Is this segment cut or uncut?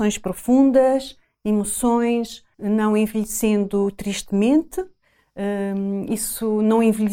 cut